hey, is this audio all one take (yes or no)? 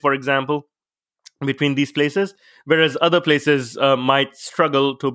yes